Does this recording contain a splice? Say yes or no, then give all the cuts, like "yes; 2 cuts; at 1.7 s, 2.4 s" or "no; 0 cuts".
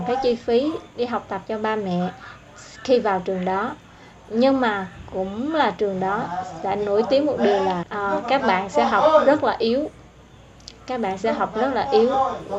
yes; 1 cut; at 7.8 s